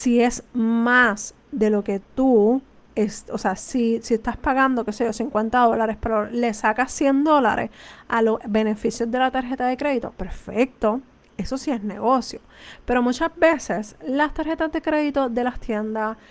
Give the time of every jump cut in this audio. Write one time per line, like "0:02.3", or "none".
none